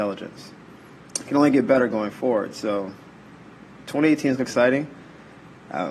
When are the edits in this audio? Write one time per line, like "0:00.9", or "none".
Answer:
0:01.1
0:04.4